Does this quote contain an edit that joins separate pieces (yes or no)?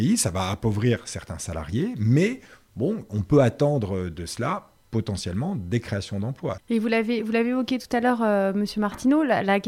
no